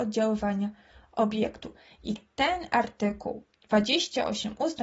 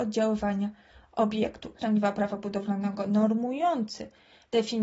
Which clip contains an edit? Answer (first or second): second